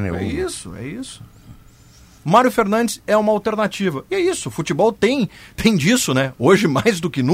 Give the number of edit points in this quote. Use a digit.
1